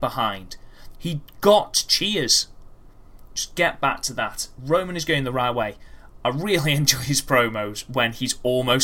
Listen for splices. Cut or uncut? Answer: cut